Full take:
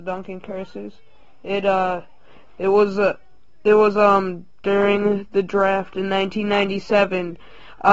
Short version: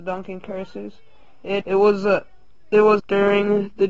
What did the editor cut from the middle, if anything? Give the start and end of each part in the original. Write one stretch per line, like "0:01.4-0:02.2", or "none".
0:01.6-0:02.5
0:03.9-0:04.5